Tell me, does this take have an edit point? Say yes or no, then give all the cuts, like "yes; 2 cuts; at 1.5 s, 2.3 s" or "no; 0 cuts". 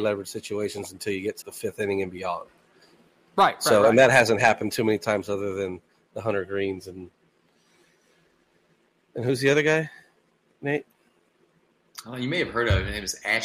yes; 1 cut; at 1.4 s